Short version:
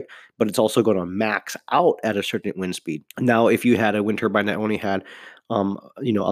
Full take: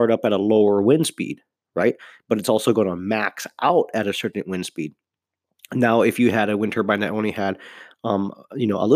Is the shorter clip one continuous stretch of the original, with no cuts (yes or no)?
no